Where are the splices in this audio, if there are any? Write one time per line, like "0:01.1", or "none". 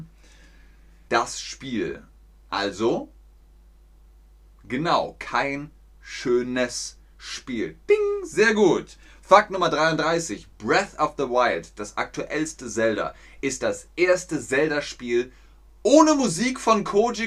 0:01.1